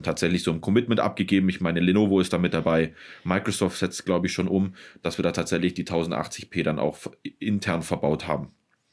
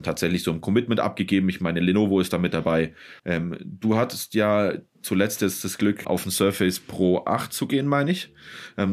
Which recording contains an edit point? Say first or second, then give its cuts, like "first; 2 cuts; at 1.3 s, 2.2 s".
second; 2 cuts; at 3.2 s, 6.0 s